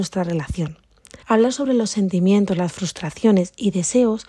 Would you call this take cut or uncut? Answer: cut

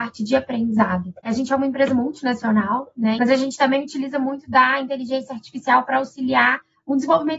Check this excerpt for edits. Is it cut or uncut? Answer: cut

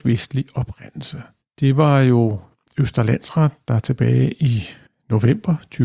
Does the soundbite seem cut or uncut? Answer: uncut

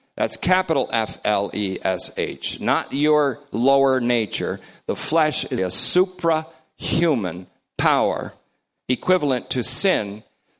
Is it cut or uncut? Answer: cut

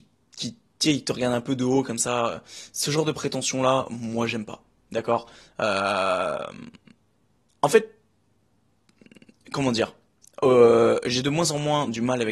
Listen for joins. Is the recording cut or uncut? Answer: uncut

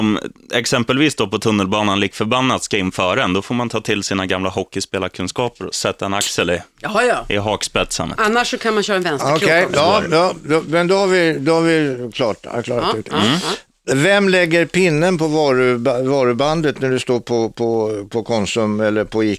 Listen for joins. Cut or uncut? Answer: uncut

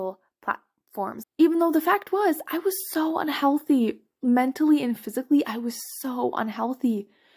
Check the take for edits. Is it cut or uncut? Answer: cut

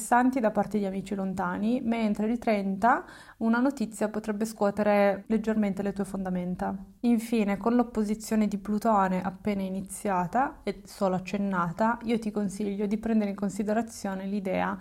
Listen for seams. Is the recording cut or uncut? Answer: cut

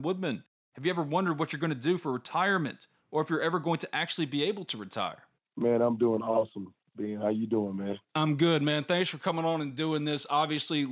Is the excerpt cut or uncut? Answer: cut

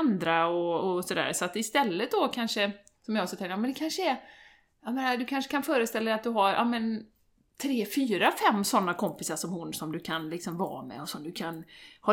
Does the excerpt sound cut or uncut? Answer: uncut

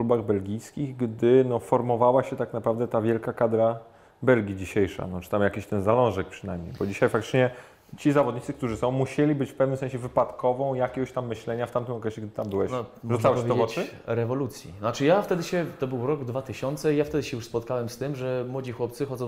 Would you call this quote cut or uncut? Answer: uncut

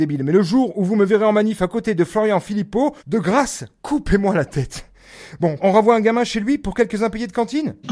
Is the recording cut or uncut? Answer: cut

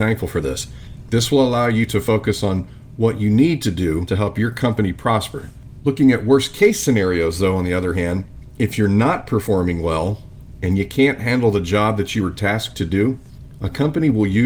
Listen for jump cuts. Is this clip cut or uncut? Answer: uncut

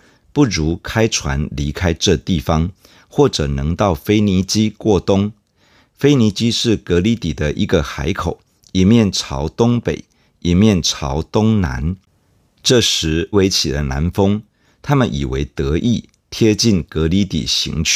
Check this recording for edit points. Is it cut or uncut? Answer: cut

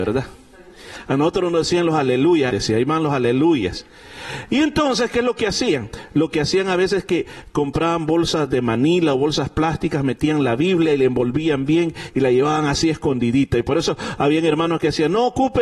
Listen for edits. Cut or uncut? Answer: cut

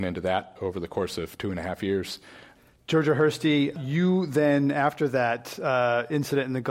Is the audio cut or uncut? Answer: uncut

